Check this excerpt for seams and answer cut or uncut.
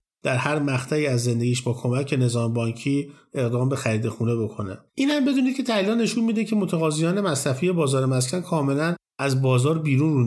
cut